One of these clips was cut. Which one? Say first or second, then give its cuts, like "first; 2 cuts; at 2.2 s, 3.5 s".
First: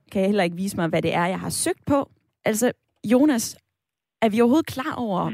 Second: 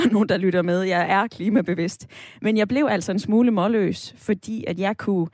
first; 1 cut; at 2.3 s